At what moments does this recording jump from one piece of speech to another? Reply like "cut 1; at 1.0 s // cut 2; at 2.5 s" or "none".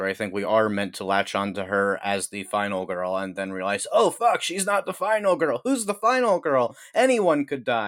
none